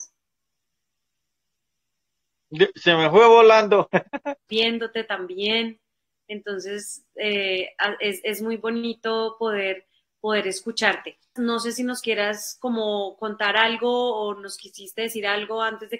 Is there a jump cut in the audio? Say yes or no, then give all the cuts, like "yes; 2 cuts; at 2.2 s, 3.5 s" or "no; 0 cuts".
yes; 2 cuts; at 4.5 s, 11.4 s